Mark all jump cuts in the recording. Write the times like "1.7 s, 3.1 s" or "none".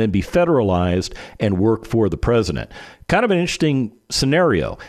none